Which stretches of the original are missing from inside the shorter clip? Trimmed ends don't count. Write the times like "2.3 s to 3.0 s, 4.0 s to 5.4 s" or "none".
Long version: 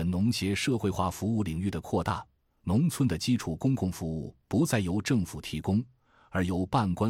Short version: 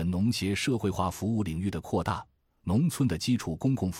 none